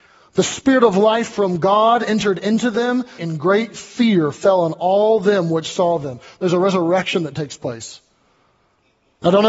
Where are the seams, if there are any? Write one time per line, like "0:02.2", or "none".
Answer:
0:03.2